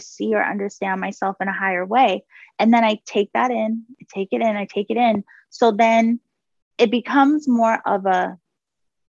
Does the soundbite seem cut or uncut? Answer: uncut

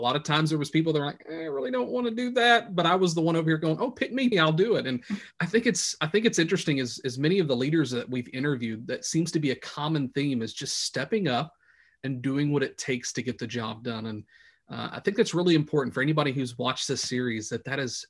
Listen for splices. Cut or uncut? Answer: cut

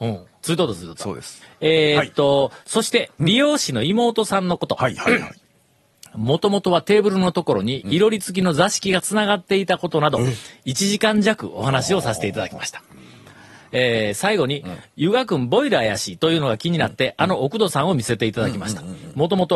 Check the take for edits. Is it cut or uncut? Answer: uncut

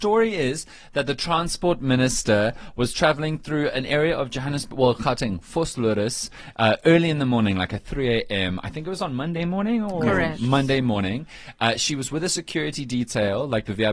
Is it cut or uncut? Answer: uncut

